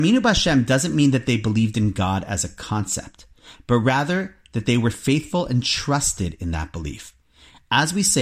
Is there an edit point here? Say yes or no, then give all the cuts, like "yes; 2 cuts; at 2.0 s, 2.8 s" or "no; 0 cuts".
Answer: no; 0 cuts